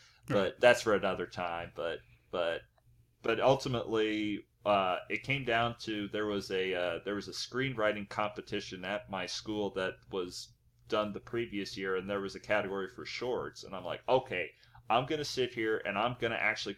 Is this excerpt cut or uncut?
uncut